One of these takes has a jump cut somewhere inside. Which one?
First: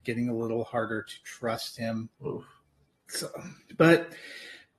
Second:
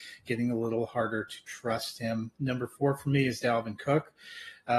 first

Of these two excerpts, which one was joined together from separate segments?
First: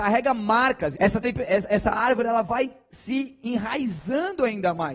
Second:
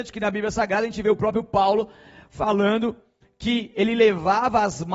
first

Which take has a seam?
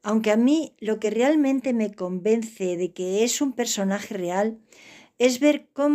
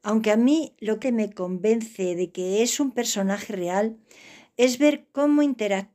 second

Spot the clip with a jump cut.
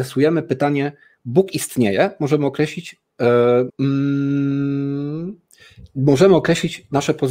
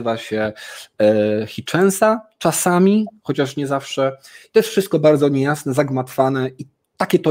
first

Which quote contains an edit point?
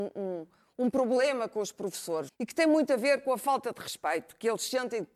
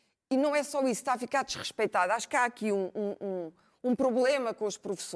first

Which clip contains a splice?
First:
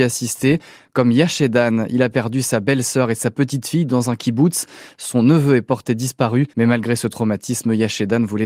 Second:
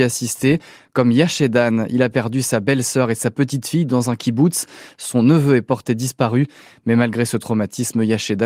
first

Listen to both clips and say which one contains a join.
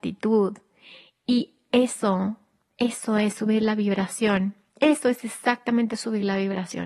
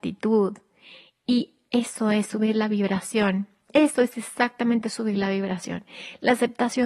second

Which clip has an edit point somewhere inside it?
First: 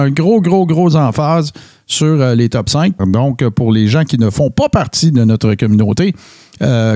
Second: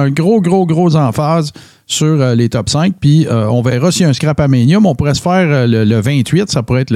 first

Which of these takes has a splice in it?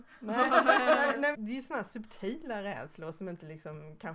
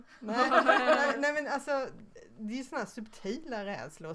first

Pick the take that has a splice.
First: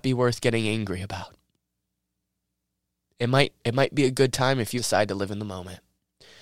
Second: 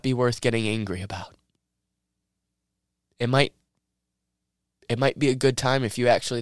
first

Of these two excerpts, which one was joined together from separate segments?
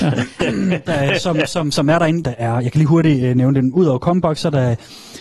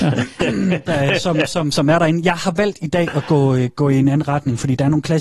first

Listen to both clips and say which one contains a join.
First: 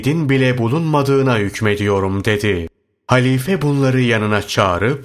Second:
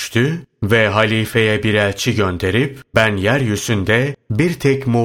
second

